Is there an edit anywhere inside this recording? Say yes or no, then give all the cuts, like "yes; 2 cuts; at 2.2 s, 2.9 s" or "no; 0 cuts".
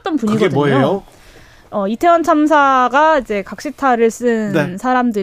no; 0 cuts